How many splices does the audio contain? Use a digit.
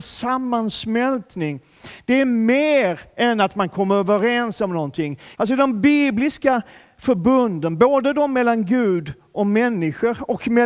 1